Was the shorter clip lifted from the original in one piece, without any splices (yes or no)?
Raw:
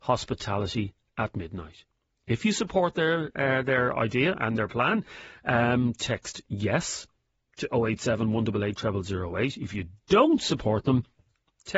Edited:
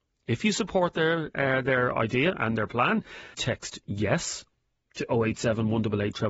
no